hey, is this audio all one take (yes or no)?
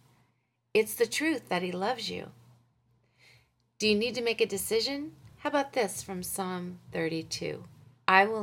yes